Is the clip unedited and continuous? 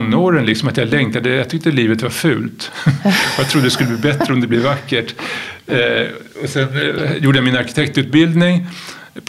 yes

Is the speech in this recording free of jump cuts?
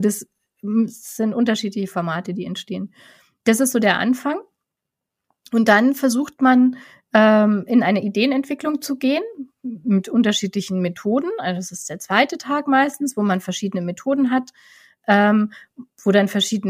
yes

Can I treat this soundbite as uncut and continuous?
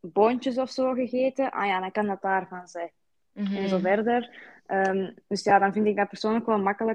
yes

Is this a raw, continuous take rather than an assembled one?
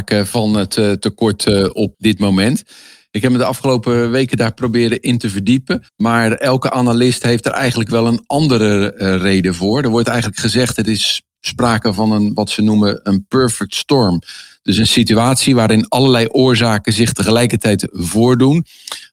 no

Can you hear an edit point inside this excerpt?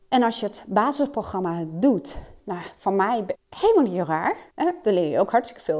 yes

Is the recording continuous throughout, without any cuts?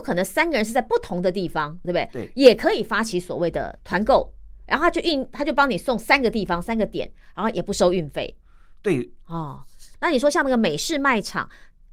no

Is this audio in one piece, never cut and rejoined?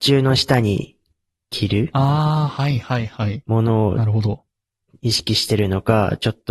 yes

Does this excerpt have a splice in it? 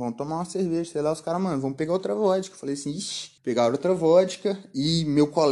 no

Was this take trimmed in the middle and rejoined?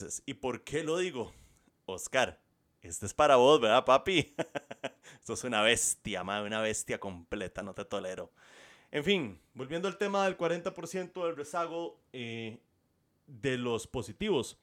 no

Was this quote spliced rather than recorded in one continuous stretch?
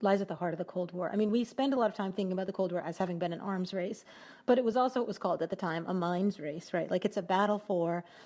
no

